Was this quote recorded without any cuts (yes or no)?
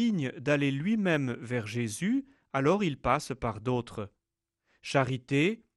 yes